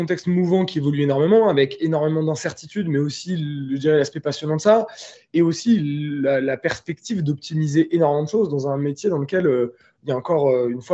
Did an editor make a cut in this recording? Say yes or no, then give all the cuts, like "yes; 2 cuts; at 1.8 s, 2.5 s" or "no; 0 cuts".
no; 0 cuts